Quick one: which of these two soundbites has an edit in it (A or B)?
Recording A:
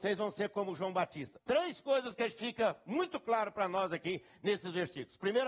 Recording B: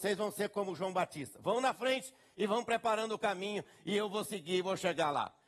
A